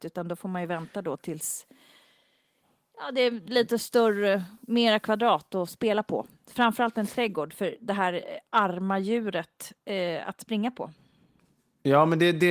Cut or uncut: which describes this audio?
uncut